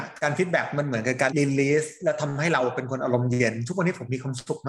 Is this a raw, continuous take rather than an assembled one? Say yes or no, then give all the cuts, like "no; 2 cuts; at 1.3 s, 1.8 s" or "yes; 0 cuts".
no; 1 cut; at 1.3 s